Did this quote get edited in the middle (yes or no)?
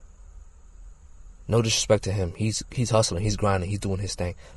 no